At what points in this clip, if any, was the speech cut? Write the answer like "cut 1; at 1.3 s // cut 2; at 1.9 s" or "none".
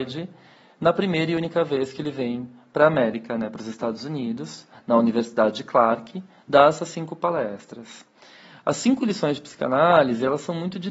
none